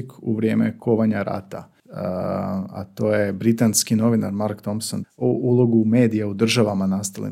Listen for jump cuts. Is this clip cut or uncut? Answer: cut